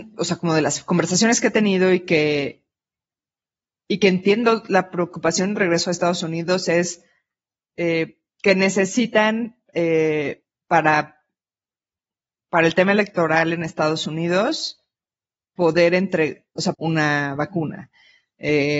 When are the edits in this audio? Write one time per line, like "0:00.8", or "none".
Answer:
0:16.7